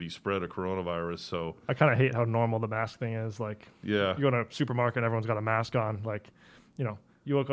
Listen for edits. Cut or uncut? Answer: uncut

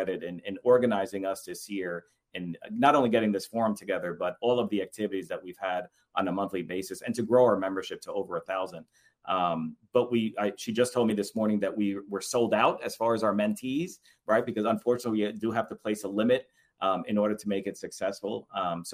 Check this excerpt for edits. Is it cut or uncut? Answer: uncut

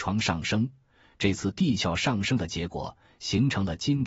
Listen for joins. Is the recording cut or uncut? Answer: uncut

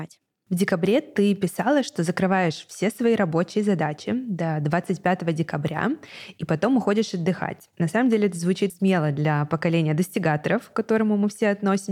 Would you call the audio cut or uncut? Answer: cut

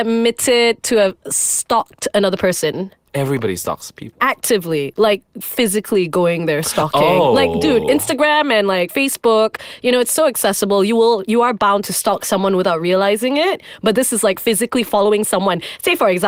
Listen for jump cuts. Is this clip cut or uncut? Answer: uncut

